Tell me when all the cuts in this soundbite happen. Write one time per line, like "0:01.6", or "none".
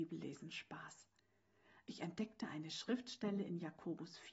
none